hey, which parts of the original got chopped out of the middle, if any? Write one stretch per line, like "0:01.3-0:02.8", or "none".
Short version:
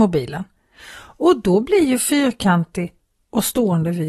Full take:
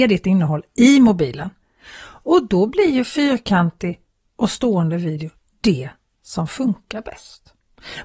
none